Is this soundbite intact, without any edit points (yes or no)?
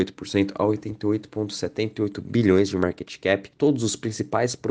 no